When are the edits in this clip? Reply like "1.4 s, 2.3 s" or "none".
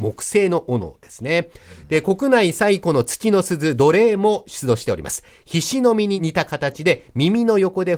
none